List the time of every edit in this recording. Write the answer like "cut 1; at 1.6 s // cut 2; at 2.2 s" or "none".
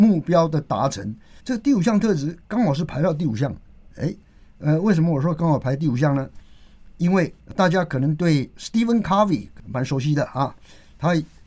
cut 1; at 1.4 s